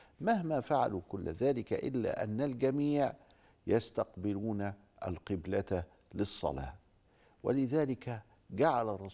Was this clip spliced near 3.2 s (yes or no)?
no